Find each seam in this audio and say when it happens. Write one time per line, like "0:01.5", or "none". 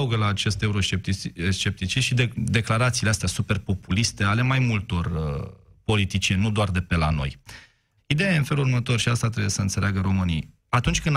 0:02.3
0:08.0